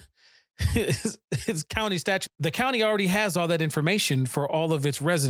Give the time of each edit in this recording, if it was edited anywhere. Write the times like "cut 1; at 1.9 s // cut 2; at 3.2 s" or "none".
cut 1; at 2.3 s